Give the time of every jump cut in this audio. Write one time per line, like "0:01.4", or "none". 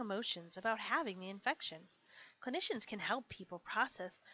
none